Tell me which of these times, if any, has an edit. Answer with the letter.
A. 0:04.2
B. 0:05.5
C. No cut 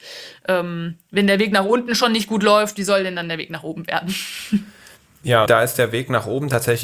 B